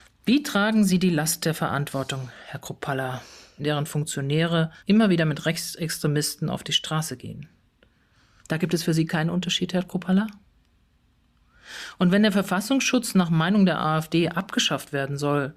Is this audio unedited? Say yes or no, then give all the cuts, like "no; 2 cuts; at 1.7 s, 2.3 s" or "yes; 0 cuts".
no; 3 cuts; at 3.6 s, 4.8 s, 8.4 s